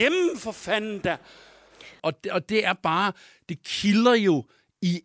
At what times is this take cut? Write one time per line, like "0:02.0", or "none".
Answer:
0:02.0